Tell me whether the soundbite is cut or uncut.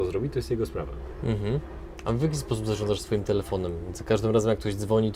uncut